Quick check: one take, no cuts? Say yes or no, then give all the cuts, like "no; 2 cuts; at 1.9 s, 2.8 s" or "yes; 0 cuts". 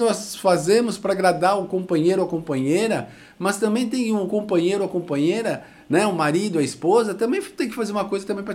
yes; 0 cuts